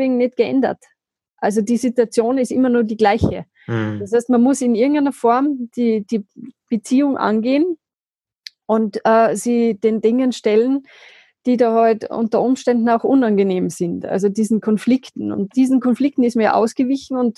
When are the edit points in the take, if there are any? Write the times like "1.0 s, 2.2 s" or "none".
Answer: none